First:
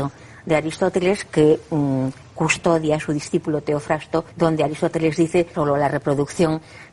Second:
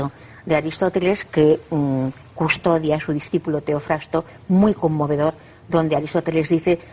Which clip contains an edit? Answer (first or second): first